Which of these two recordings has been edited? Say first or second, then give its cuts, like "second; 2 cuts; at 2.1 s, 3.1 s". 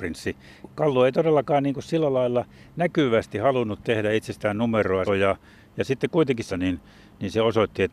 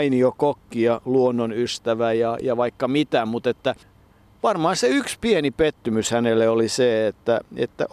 first; 2 cuts; at 5.1 s, 6.5 s